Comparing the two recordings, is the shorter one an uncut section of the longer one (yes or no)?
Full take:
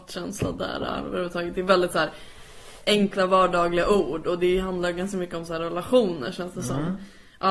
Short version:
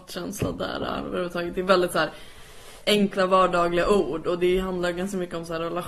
yes